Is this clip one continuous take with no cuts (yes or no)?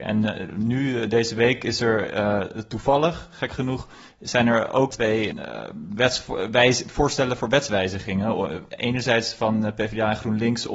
yes